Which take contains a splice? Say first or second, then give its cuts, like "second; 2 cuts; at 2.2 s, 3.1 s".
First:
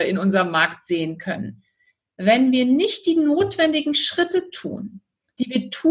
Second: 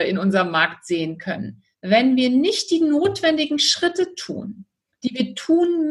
second; 1 cut; at 1.7 s